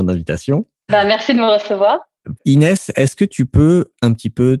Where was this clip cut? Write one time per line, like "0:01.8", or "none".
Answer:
0:02.4